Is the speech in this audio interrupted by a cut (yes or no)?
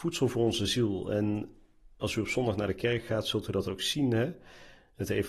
no